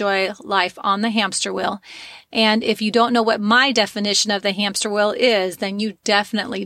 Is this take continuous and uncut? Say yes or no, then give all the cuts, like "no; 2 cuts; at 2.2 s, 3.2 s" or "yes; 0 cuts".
yes; 0 cuts